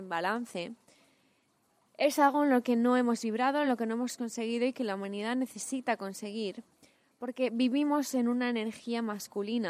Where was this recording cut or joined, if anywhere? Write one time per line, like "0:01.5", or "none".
none